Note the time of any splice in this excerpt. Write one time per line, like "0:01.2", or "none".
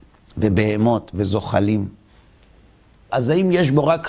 0:03.1